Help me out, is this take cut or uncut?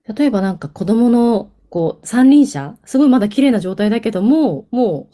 uncut